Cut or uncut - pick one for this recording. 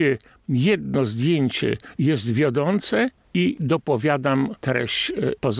cut